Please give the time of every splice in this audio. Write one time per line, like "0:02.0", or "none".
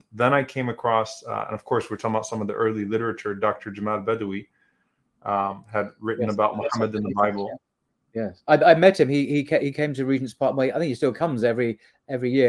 none